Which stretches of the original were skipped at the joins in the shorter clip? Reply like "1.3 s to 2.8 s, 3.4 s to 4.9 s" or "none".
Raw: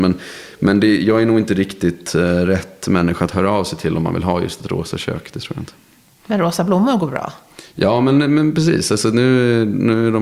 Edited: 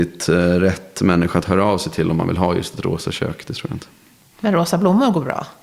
none